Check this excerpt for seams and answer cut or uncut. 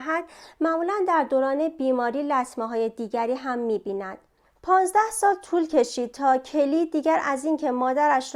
cut